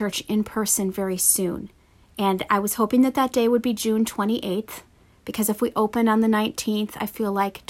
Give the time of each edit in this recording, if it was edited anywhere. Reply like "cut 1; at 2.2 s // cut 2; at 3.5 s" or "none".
none